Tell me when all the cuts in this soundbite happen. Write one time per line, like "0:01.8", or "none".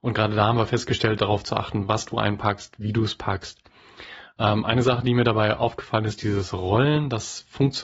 0:01.2